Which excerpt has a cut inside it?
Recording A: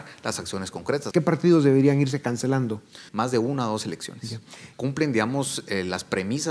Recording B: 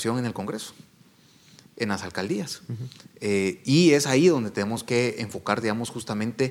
A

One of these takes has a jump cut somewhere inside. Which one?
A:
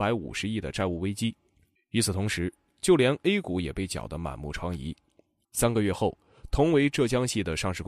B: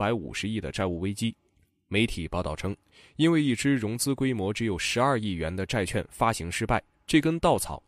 A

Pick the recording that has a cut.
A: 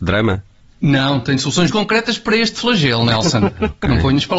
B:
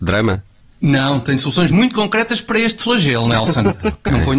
A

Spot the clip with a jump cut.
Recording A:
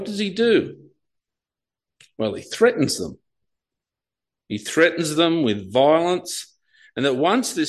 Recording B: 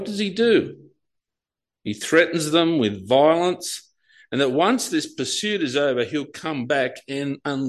B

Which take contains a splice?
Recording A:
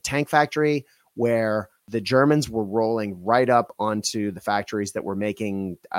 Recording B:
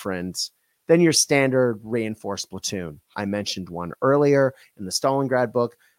B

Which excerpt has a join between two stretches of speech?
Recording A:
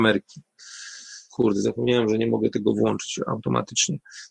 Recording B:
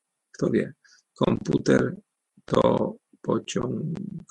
A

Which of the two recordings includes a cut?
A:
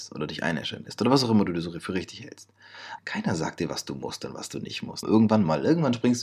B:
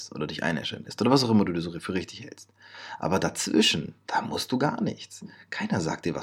A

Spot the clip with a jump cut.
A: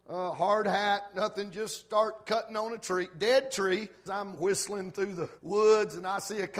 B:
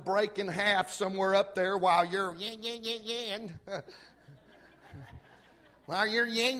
A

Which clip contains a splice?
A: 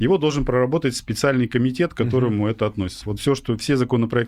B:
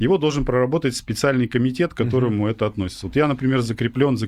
A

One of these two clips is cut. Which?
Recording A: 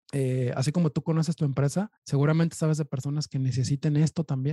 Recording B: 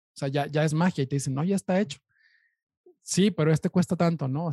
A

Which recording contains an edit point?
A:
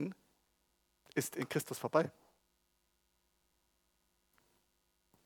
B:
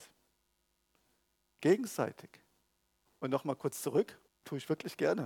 B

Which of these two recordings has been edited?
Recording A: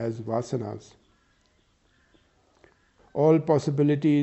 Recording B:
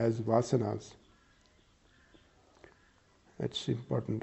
A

